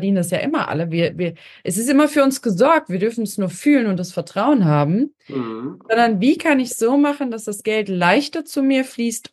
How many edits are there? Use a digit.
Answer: 0